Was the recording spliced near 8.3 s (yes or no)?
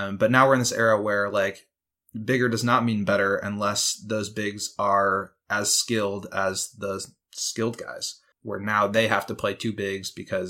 yes